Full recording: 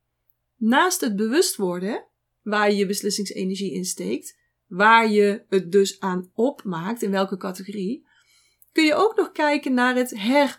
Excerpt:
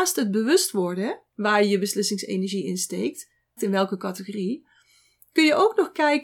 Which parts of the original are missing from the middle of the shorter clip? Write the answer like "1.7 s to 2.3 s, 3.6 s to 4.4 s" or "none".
2.1 s to 2.4 s, 4.6 s to 7.0 s